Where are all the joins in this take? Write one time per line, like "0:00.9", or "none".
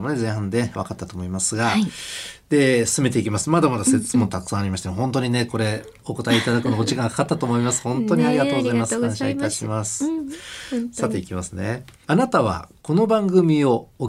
none